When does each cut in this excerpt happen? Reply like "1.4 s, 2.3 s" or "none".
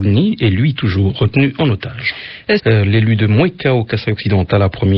2.6 s

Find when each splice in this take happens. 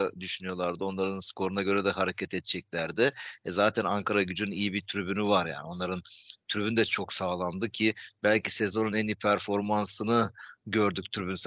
none

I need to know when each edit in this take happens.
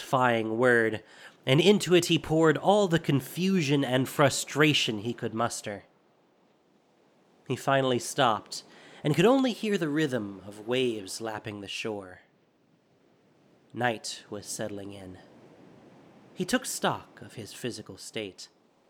none

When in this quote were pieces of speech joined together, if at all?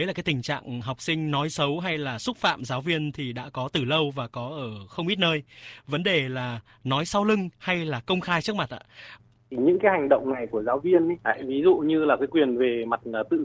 9.2 s, 11.2 s

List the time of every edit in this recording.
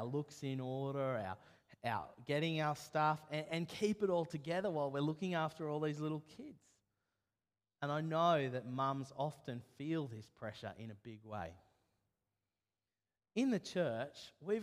none

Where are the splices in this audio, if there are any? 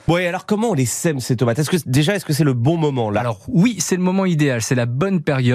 none

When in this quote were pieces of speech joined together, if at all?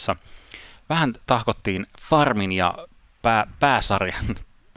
none

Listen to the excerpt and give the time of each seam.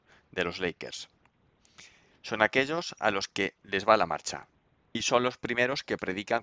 2.1 s

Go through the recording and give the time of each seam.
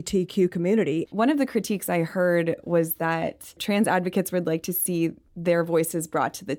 1.1 s

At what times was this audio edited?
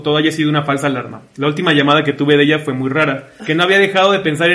3.4 s

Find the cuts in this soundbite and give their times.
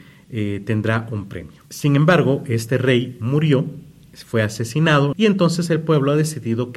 1.7 s, 5.1 s

